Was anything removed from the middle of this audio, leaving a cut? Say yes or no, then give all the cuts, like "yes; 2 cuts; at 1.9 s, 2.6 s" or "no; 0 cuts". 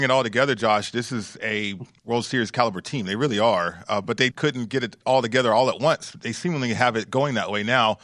yes; 1 cut; at 4.3 s